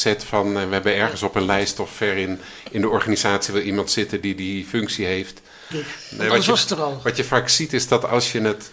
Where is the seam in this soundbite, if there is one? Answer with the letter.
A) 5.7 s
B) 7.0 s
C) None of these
A